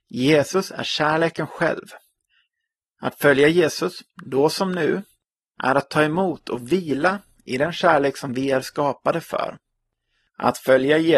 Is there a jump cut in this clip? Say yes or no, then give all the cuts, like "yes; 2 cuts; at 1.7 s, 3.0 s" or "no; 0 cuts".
no; 0 cuts